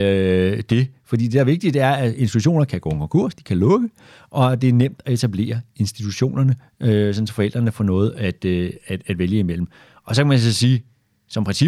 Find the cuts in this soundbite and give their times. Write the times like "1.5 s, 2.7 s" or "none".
none